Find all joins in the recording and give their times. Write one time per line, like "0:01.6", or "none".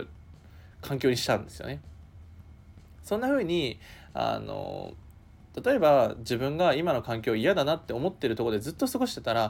none